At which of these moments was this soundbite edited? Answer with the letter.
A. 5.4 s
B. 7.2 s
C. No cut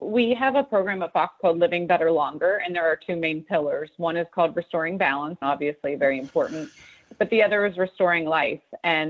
A